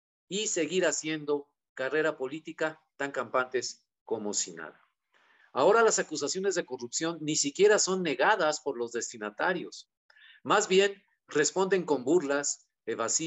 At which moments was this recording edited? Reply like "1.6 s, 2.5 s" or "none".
5.4 s